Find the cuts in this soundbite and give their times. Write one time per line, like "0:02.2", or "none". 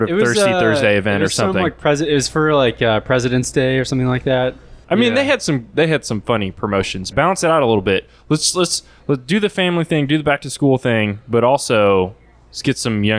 0:07.1